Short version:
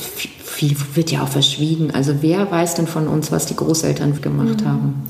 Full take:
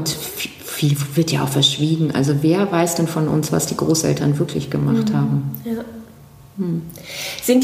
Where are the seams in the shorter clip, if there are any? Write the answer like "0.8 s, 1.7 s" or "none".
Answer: 4.2 s